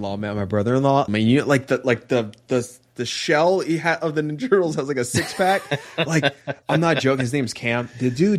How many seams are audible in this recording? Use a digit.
1